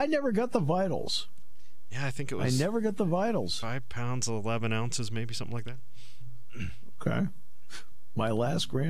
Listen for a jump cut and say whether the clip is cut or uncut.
uncut